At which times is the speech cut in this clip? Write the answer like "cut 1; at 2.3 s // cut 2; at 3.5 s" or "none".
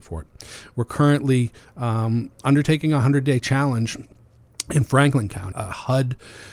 cut 1; at 5.5 s